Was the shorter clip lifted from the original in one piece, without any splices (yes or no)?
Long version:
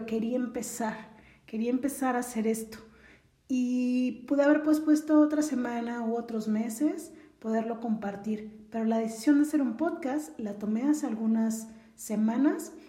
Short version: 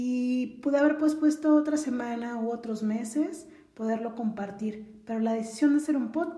yes